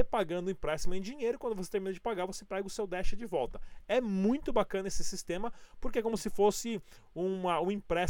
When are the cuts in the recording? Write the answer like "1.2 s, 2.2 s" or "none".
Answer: none